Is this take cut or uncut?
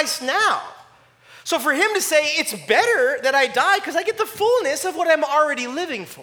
uncut